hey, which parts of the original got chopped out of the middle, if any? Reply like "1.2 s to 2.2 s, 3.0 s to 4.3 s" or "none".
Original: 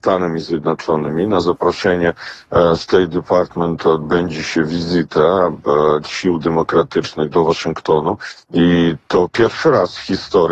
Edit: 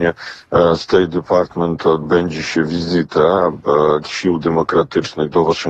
none